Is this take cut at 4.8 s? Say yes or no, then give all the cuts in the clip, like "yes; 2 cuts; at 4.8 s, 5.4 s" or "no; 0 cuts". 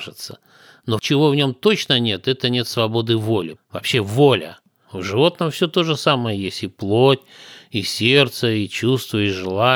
yes; 2 cuts; at 3.5 s, 4.8 s